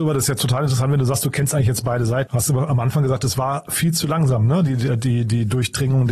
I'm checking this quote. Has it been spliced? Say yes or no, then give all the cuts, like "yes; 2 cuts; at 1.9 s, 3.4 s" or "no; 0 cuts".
yes; 1 cut; at 2.3 s